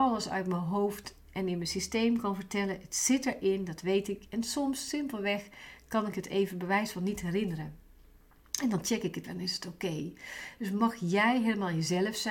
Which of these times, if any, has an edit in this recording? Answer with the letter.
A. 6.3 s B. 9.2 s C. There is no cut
B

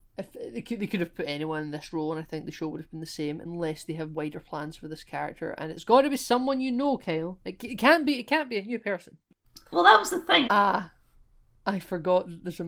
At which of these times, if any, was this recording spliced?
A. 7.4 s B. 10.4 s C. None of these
B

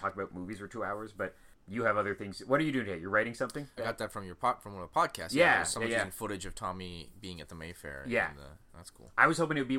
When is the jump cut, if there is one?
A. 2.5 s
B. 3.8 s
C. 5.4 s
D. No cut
B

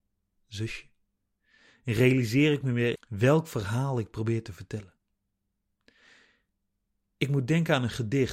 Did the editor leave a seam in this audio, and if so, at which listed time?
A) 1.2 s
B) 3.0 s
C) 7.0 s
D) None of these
B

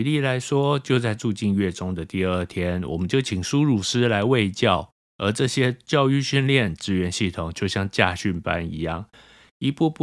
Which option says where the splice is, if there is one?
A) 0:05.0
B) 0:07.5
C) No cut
A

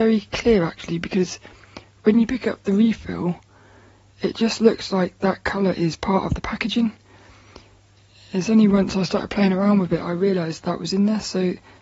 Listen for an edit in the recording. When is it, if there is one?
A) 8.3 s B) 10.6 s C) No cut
B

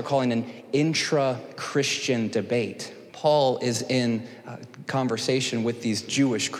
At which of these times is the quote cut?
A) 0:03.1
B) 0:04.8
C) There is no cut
A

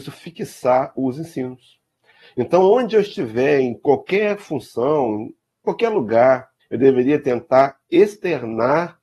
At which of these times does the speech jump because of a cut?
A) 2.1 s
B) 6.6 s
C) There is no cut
B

